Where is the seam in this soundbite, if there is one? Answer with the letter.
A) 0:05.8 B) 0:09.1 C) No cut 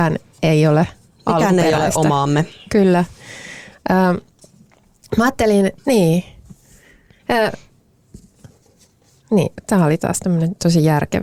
A